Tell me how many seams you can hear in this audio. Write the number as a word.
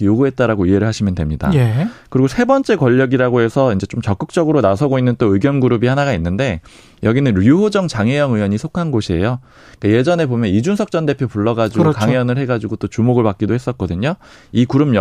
zero